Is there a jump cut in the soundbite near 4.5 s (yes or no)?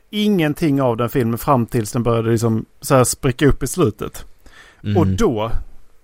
no